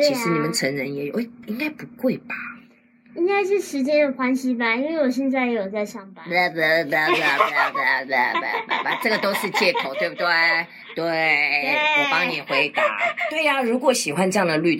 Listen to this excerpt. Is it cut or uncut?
uncut